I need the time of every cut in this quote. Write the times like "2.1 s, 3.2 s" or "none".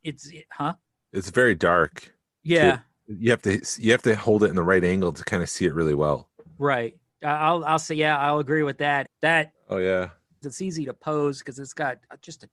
9.1 s, 10.4 s